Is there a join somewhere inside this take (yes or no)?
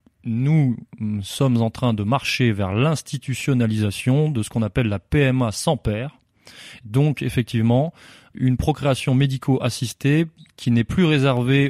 yes